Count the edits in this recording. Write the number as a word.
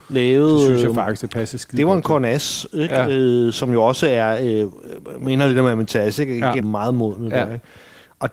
one